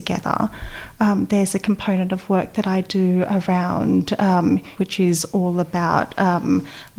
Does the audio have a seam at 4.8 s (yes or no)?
yes